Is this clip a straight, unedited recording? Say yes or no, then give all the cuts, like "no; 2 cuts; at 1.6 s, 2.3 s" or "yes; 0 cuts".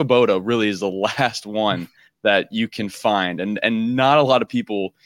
yes; 0 cuts